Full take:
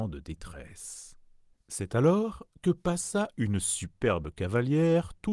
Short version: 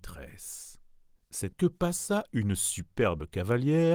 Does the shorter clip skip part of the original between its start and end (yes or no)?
yes